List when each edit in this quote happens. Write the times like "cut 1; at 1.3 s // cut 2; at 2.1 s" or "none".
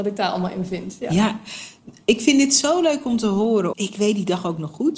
cut 1; at 3.7 s